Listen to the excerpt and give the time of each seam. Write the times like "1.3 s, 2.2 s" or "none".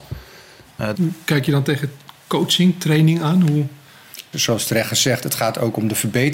0.9 s, 4.3 s